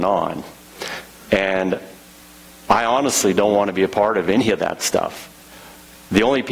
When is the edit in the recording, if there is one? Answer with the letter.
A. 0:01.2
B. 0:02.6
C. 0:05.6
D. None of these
D